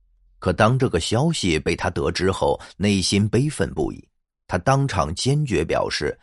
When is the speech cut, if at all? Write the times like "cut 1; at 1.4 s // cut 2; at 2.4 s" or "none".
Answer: none